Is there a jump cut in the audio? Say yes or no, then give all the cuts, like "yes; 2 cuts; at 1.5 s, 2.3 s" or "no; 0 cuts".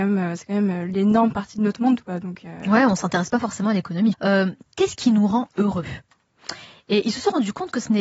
yes; 1 cut; at 4.1 s